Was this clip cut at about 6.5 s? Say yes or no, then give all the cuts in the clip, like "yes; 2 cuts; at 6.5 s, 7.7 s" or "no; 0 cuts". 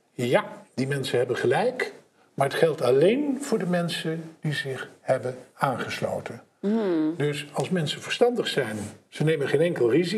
no; 0 cuts